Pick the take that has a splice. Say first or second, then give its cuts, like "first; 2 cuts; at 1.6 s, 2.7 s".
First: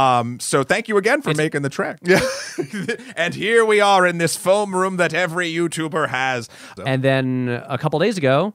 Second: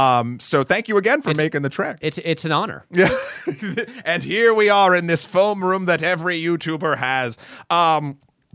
first; 2 cuts; at 2.0 s, 6.8 s